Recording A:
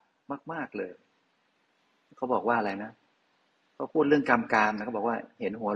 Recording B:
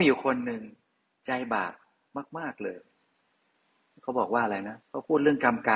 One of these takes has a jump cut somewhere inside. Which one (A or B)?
B